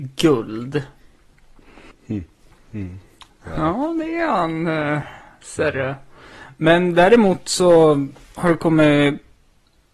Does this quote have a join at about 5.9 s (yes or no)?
no